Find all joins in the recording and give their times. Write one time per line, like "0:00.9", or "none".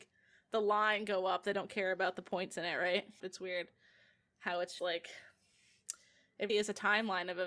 0:03.2
0:04.8
0:06.5